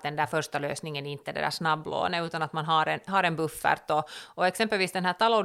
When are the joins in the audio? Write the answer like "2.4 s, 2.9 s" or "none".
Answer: none